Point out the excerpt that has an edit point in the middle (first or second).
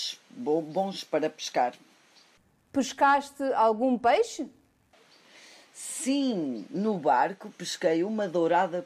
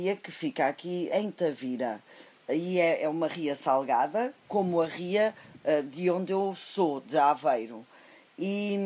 second